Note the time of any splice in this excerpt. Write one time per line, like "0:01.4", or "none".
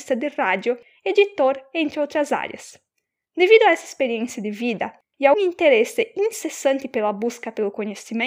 0:05.3